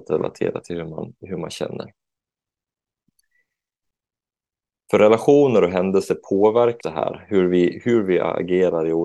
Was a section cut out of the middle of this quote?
yes; 1 cut; at 6.8 s

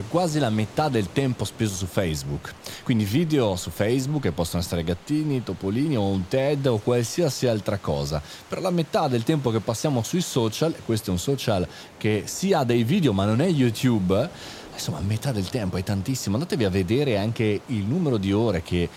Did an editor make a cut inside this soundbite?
no; 0 cuts

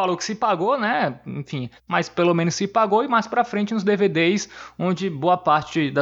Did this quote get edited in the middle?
yes; 1 cut; at 1.8 s

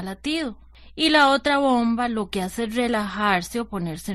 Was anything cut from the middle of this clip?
no; 0 cuts

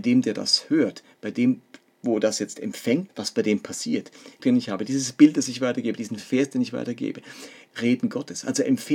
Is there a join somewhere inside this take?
yes; 3 cuts; at 3.1 s, 4.4 s, 7.7 s

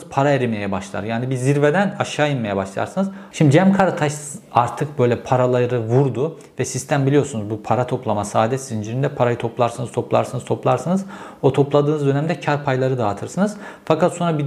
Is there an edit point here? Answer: yes; 1 cut; at 3.3 s

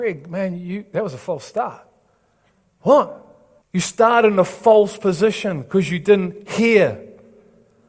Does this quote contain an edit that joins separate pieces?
yes; 1 cut; at 3.6 s

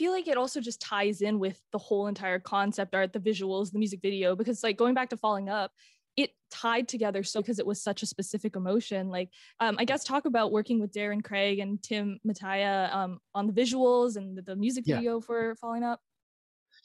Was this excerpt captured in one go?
no; 1 cut; at 7.4 s

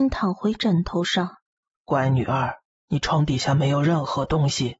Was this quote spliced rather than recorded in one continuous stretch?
yes; 1 cut; at 1.7 s

